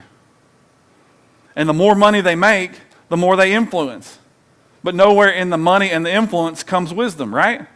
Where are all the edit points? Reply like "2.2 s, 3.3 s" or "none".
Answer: none